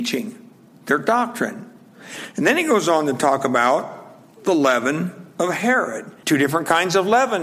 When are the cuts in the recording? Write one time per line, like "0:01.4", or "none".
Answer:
0:06.2